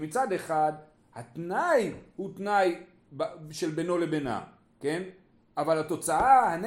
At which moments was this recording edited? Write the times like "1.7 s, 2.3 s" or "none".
none